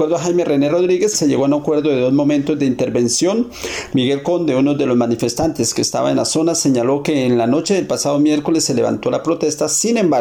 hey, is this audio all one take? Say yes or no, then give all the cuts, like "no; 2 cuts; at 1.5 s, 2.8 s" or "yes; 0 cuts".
no; 2 cuts; at 1.1 s, 3.9 s